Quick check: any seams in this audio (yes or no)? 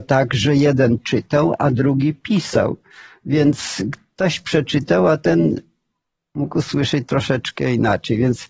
no